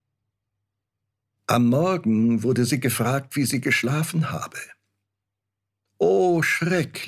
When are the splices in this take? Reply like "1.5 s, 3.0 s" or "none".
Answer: none